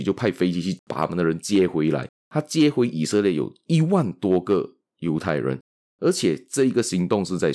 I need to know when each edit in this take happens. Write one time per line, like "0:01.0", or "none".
0:02.3